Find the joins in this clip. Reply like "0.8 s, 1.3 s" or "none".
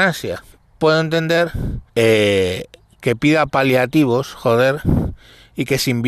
1.9 s